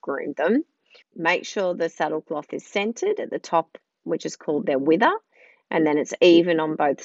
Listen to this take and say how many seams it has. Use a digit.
1